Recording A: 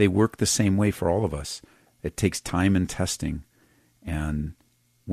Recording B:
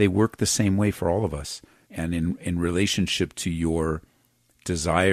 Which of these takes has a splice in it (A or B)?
B